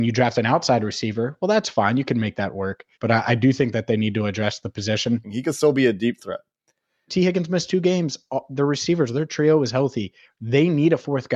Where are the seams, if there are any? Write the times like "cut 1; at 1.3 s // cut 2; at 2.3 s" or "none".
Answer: cut 1; at 2.9 s // cut 2; at 5.2 s // cut 3; at 7.1 s